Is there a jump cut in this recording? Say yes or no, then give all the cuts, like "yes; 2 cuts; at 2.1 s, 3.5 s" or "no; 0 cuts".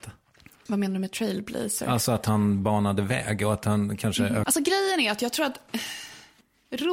yes; 1 cut; at 4.4 s